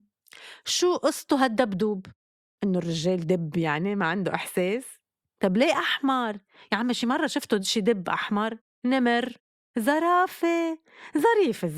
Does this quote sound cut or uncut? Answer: cut